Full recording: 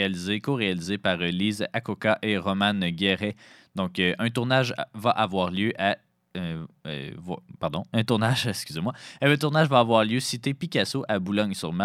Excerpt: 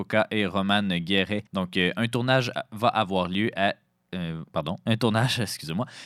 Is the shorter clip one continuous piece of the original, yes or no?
no